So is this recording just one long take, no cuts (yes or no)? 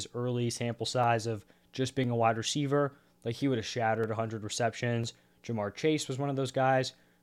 yes